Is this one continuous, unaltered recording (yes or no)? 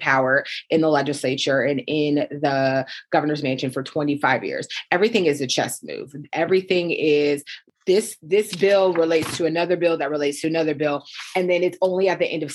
yes